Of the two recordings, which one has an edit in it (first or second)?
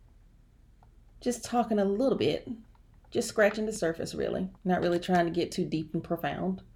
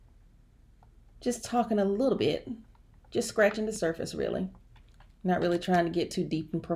first